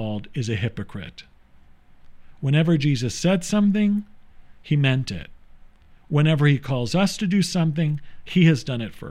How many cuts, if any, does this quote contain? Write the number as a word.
zero